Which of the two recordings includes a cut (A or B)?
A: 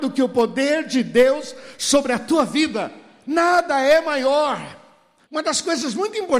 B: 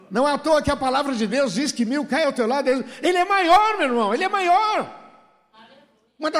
A